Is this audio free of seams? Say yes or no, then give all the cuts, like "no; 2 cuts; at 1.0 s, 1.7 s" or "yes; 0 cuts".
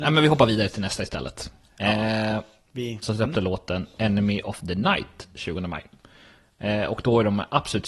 no; 1 cut; at 3.0 s